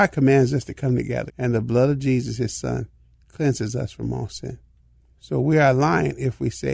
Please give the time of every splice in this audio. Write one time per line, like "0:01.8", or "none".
0:01.3
0:05.1